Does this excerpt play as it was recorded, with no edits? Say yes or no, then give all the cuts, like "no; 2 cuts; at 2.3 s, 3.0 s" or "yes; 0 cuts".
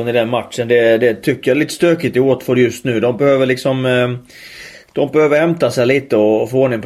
yes; 0 cuts